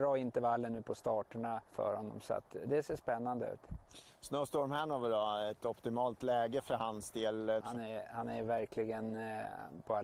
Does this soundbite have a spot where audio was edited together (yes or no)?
yes